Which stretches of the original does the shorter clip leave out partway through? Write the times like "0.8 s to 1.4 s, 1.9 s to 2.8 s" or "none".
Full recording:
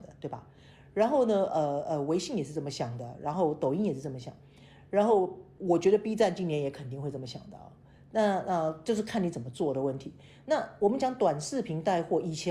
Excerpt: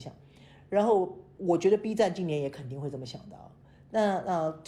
none